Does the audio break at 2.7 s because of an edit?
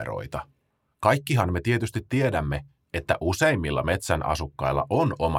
no; 1 cut; at 0.9 s

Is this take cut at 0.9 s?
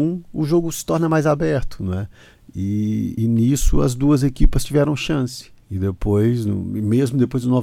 no; 2 cuts; at 3.2 s, 5.6 s

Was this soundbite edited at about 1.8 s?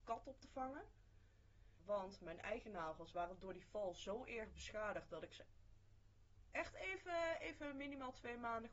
yes; 1 cut; at 1.8 s

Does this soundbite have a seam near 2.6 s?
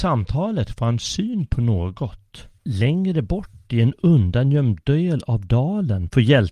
yes; 1 cut; at 2.6 s

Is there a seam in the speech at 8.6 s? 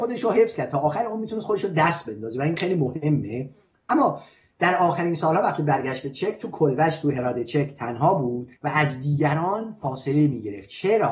yes; 1 cut; at 8.6 s

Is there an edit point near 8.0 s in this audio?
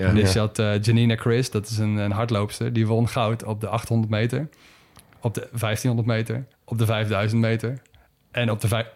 no; 1 cut; at 6.5 s

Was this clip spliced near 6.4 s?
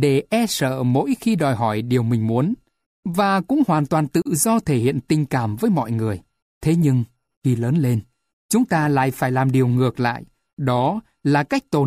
yes; 1 cut; at 6.4 s

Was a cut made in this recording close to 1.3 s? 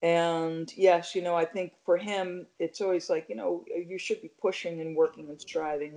no; 0 cuts

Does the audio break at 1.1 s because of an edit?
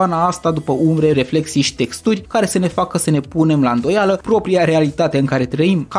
yes; 1 cut; at 1.1 s

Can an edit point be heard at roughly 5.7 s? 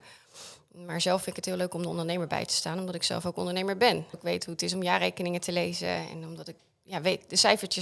no; 1 cut; at 4.1 s

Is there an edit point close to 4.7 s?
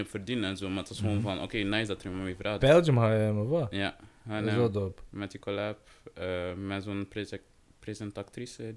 no; 1 cut; at 2.6 s

